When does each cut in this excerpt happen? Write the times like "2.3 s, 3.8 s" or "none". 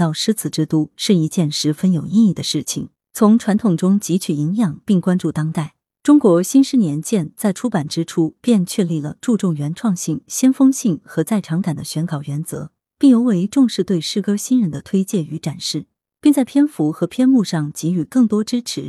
16.1 s